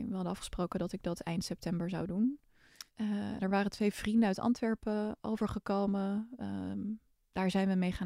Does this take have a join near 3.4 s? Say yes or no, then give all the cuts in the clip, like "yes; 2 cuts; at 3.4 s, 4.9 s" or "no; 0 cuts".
yes; 1 cut; at 3.4 s